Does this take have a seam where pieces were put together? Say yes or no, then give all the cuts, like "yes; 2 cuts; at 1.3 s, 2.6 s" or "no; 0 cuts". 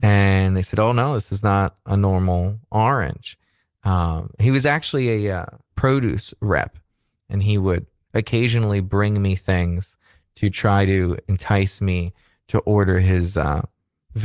yes; 1 cut; at 5.7 s